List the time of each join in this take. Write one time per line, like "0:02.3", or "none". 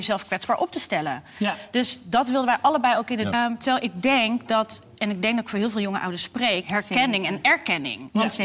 0:03.3
0:06.6